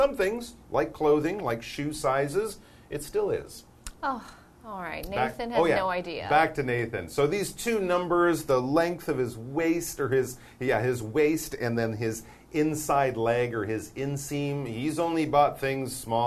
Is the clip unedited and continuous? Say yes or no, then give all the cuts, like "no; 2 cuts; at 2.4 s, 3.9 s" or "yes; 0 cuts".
yes; 0 cuts